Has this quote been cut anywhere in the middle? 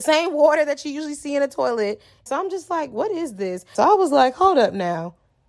yes; 2 cuts; at 2.3 s, 3.7 s

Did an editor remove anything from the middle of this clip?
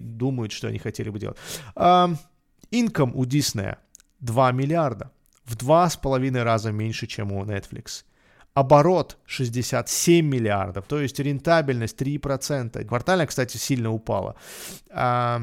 yes; 2 cuts; at 10.9 s, 12.9 s

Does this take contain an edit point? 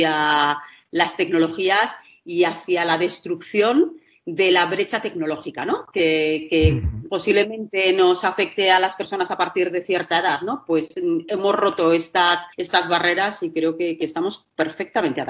yes; 1 cut; at 12.5 s

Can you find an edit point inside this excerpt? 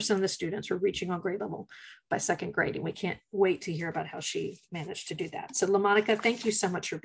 no; 0 cuts

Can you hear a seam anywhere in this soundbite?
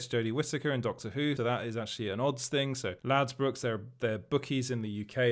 yes; 2 cuts; at 1.4 s, 3.0 s

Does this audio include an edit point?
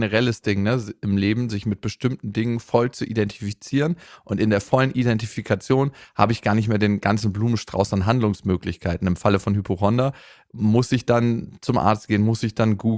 no; 0 cuts

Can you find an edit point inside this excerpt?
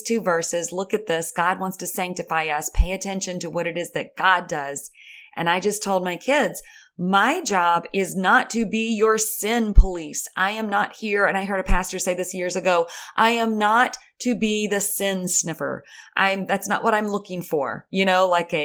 no; 0 cuts

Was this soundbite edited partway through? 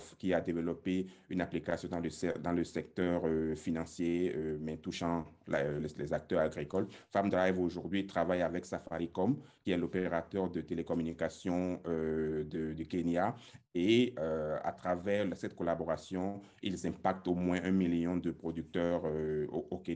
no; 0 cuts

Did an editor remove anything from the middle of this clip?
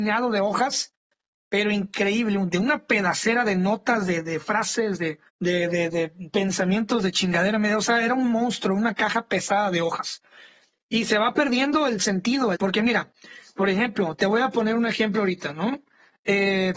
yes; 3 cuts; at 5.3 s, 10.7 s, 12.5 s

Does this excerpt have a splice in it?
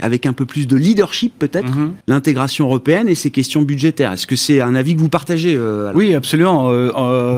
yes; 1 cut; at 2.0 s

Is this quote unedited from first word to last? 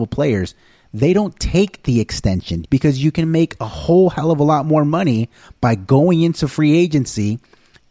no; 1 cut; at 2.6 s

